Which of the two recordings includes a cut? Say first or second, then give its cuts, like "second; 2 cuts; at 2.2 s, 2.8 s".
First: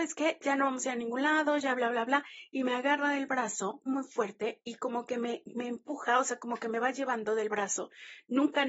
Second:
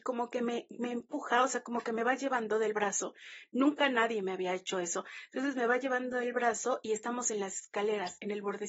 first; 1 cut; at 3.9 s